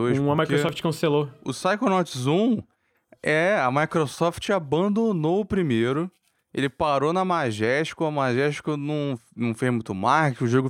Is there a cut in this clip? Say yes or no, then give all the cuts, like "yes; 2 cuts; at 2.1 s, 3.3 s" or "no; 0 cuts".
no; 0 cuts